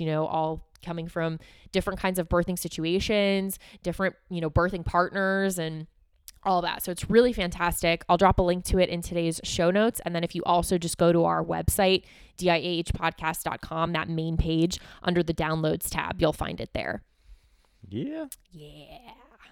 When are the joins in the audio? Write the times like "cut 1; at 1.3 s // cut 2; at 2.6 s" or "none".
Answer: none